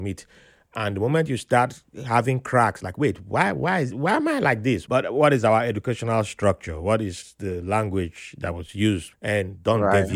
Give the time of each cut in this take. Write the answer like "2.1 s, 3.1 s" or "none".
4.9 s, 9.1 s